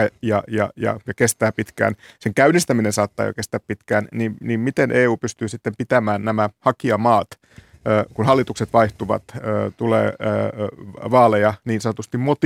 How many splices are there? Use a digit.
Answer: 0